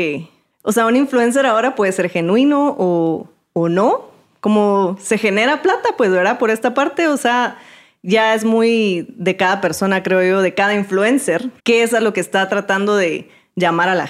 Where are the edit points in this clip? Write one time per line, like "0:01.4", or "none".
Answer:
0:11.6